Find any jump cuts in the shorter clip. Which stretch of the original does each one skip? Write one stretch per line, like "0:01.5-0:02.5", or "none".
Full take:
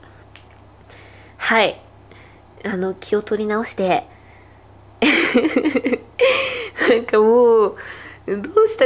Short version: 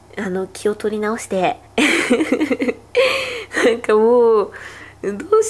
0:04.1-0:04.9

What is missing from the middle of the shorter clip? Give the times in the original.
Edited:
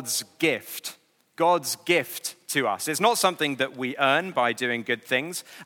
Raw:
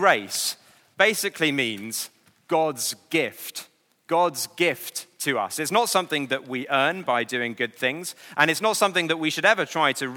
none

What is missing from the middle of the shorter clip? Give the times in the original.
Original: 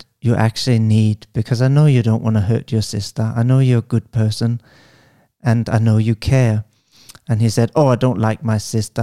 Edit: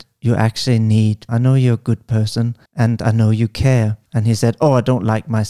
0:01.3-0:03.3
0:04.7-0:05.3
0:06.7-0:07.2

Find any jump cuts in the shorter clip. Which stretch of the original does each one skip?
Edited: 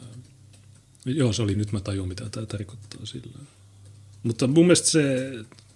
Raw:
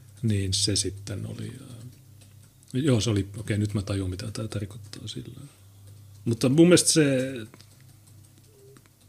0:03.2-0:03.6

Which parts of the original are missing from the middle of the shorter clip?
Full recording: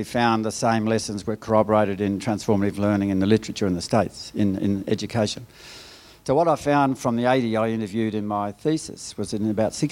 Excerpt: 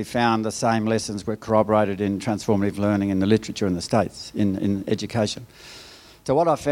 none

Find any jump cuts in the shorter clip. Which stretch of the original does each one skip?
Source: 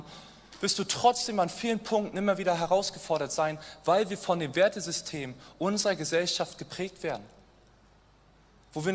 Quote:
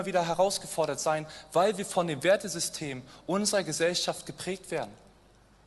none

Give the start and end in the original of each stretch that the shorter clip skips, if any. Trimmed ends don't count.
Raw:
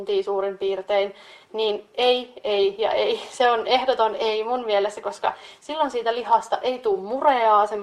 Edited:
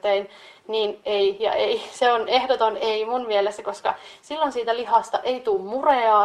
0:01.9-0:02.4

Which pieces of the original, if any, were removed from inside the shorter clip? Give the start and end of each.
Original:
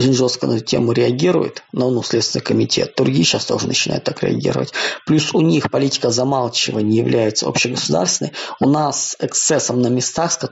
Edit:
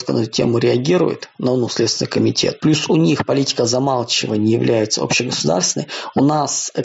0:02.9-0:05.0

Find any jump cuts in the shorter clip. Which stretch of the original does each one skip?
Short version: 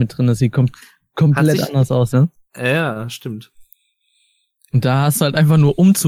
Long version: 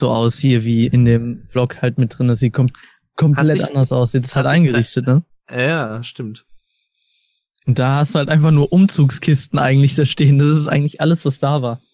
0:04.1-0:05.1

